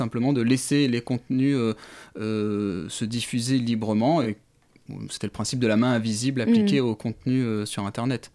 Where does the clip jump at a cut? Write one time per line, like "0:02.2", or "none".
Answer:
none